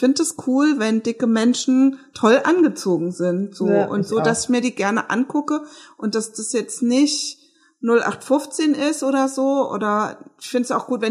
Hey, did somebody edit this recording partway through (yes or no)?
no